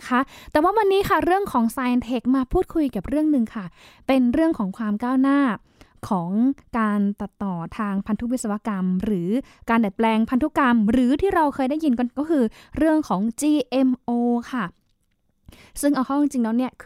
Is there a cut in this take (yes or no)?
no